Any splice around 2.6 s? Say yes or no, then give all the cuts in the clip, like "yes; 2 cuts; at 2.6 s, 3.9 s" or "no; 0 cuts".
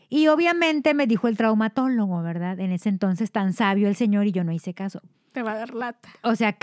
no; 1 cut; at 5.1 s